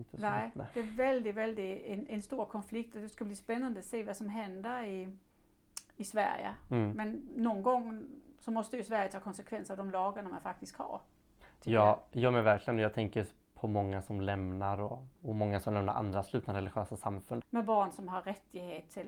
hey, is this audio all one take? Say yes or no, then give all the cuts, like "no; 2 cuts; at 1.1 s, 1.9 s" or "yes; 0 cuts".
no; 2 cuts; at 15.2 s, 17.4 s